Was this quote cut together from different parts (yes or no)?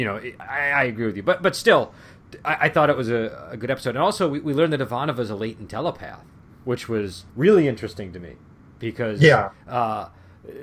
yes